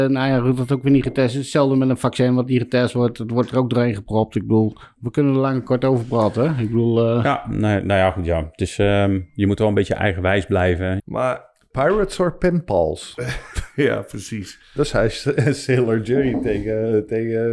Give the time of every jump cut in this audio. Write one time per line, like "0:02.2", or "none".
0:11.0